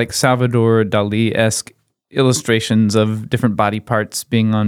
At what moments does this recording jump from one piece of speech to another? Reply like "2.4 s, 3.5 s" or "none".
none